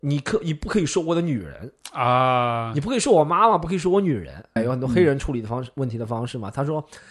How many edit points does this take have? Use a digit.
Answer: 1